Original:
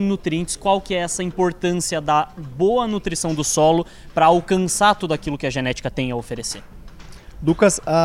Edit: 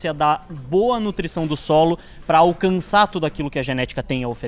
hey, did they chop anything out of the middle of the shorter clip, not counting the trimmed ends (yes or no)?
no